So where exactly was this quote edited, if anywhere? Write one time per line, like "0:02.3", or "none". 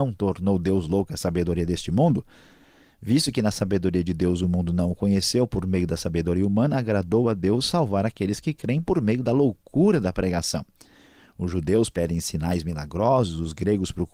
none